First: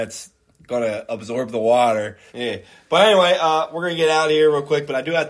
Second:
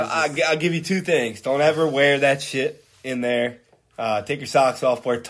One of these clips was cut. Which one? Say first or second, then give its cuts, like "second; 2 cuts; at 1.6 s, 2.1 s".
first; 1 cut; at 2.3 s